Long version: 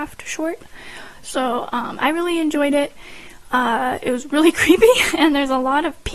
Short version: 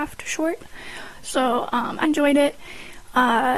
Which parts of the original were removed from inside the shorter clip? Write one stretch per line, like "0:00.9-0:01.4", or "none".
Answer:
0:02.0-0:02.4

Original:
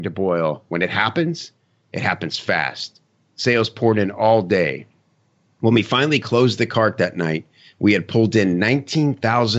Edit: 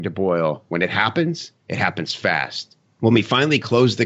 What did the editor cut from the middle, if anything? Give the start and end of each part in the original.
0:01.6-0:01.8
0:03.1-0:05.4

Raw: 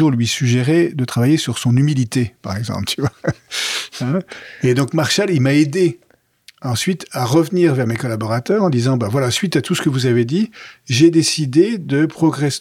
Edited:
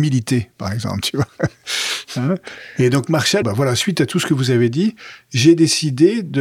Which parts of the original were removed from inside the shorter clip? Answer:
0:05.3-0:09.0

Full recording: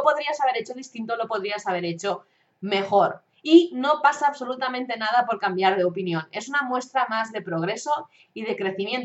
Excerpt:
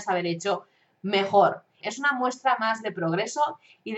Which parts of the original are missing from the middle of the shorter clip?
0:03.4-0:06.3

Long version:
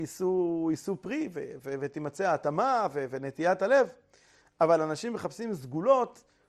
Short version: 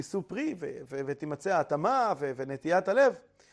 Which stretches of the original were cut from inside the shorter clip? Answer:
none

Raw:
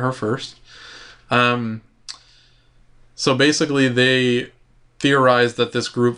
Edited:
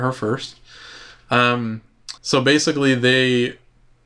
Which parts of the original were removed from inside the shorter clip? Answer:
0:02.2-0:03.1

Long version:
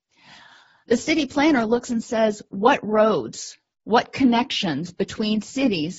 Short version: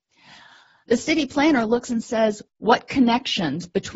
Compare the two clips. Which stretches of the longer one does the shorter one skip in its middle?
0:02.5-0:03.7

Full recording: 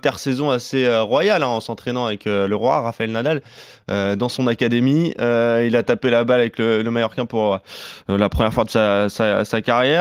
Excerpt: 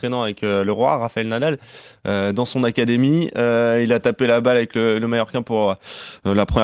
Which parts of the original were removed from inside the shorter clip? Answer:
none

